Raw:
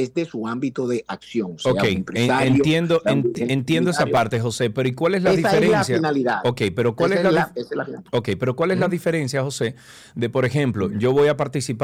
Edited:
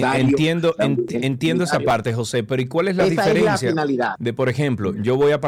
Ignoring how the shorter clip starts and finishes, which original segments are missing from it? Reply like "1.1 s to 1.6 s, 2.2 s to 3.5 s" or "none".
6.4 s to 10.1 s